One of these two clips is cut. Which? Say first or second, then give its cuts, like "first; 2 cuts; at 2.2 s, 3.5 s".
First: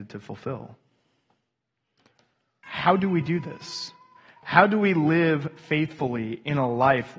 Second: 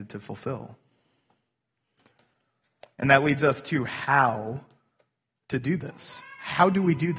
first; 1 cut; at 2.6 s